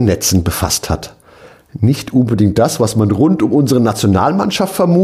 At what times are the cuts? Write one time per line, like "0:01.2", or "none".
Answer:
none